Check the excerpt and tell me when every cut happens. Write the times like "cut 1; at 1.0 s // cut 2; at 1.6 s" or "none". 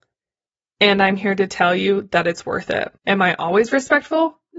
cut 1; at 3.0 s